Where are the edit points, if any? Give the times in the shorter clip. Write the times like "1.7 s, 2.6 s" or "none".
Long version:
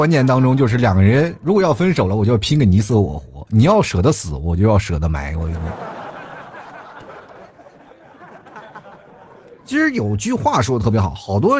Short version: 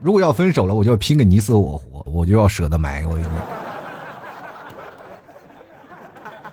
2.1 s